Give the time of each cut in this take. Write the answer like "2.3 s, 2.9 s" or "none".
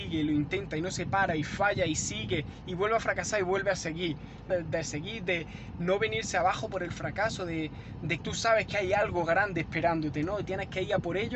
4.5 s, 8.2 s